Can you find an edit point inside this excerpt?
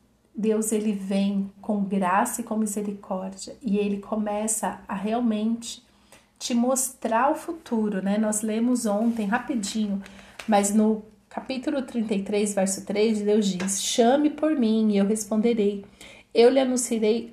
no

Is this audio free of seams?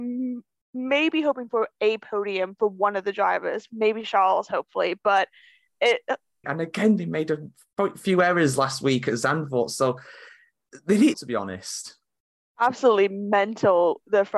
no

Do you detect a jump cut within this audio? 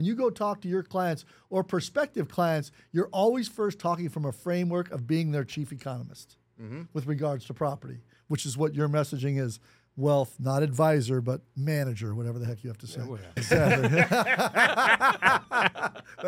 yes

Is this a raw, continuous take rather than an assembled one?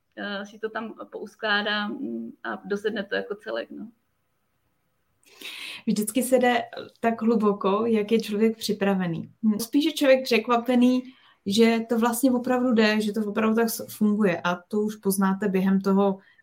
no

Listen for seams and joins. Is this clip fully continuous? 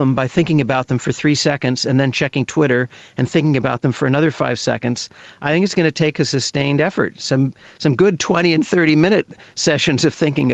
yes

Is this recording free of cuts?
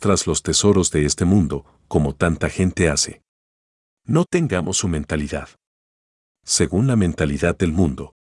yes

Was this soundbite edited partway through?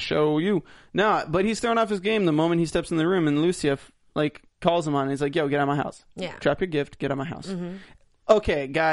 no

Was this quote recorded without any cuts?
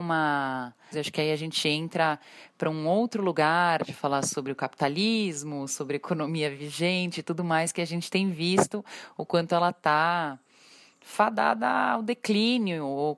no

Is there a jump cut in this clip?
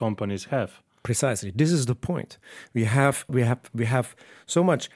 yes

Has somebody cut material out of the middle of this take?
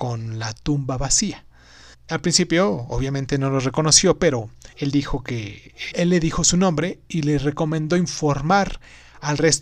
yes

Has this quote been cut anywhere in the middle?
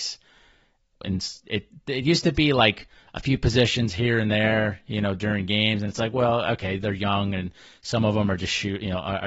yes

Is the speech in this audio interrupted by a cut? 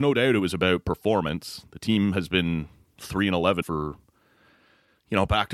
yes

